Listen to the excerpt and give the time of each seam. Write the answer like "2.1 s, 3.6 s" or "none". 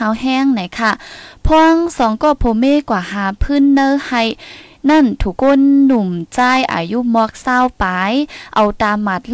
5.4 s

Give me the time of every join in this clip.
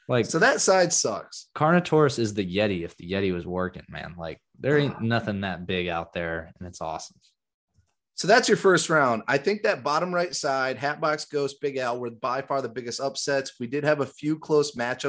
none

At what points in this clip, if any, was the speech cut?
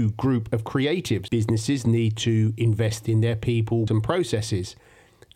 1.3 s, 3.9 s

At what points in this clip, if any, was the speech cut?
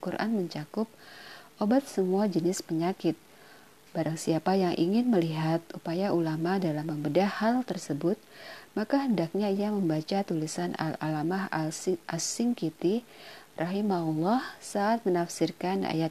3.9 s

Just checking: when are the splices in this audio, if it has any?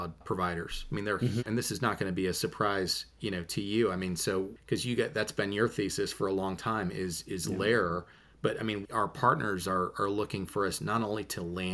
1.4 s, 8.8 s

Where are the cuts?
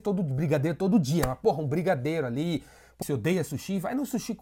3.0 s

